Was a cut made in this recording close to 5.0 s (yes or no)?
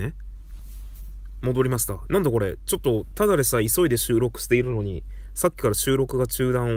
no